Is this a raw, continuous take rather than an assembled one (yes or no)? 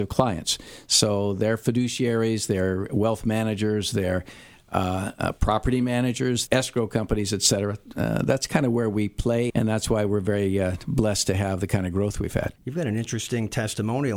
no